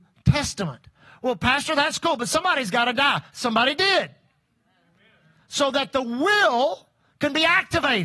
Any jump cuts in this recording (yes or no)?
no